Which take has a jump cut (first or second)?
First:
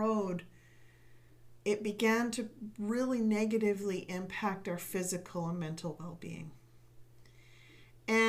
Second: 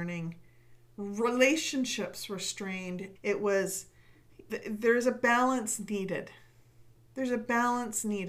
second